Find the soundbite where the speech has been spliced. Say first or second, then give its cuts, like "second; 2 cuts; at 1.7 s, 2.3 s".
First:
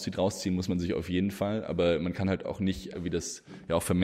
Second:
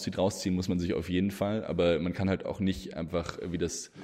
first; 1 cut; at 2.9 s